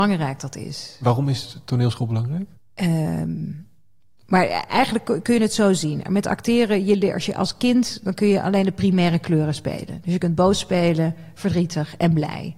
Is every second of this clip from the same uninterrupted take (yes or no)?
no